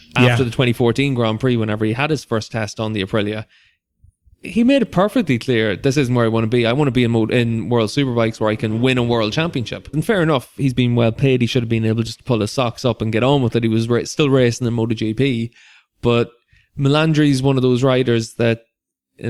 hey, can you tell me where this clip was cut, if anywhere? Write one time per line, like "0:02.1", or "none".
0:09.9